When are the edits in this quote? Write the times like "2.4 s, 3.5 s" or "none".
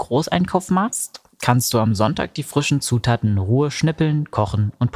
none